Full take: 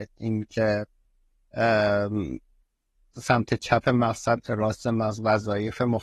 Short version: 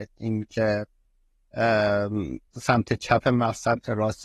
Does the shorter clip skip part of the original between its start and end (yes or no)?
yes